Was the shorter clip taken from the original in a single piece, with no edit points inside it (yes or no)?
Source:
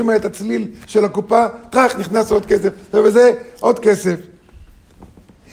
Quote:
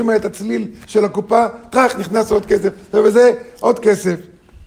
yes